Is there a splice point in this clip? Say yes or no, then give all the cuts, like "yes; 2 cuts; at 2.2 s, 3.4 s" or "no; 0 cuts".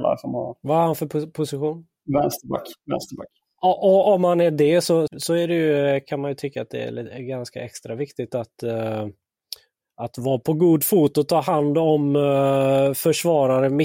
yes; 1 cut; at 5.1 s